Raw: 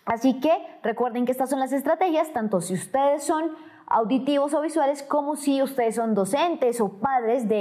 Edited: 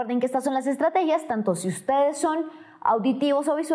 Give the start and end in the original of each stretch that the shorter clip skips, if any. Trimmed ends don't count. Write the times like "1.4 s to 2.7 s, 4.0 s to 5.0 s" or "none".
none